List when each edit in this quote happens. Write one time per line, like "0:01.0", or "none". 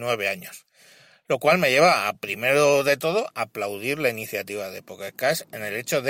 none